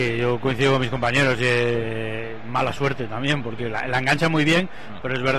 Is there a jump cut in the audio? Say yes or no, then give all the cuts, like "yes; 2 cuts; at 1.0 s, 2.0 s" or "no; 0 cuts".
no; 0 cuts